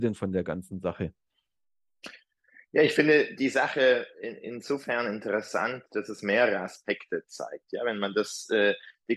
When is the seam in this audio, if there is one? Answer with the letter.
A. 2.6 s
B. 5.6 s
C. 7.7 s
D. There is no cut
D